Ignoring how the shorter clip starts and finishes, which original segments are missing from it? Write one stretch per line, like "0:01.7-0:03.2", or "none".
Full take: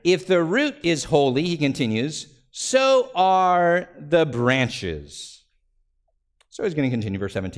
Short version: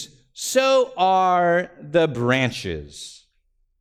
none